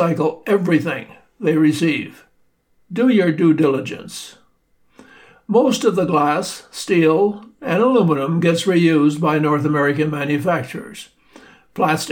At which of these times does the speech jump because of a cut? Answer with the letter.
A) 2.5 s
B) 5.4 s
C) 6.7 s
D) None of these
D